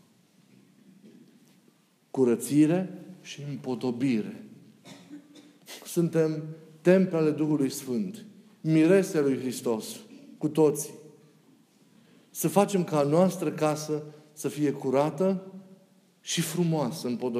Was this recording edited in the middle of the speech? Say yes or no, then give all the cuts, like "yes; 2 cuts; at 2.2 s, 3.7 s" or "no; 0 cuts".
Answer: no; 0 cuts